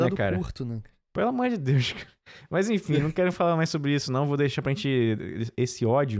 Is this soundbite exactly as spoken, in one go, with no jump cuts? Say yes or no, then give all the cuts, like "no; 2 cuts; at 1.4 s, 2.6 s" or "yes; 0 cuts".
yes; 0 cuts